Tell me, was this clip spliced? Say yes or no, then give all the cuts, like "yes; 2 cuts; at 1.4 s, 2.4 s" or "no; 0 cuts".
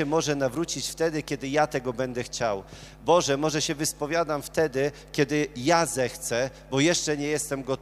no; 0 cuts